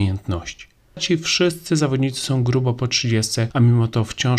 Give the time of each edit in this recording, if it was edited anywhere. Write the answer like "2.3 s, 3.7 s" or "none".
1.0 s